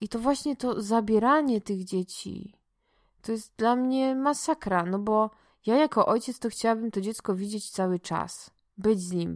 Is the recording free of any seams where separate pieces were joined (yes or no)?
yes